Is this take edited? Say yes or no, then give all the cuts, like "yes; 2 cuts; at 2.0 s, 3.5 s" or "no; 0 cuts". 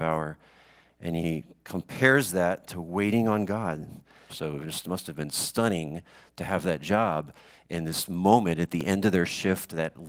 yes; 1 cut; at 4.3 s